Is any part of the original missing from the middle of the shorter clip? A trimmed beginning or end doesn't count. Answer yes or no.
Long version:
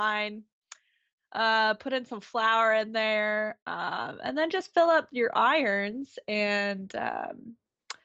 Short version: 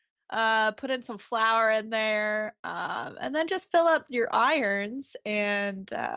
no